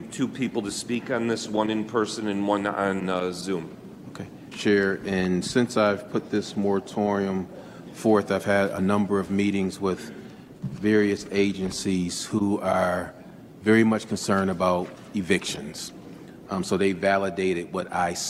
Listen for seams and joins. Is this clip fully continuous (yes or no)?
no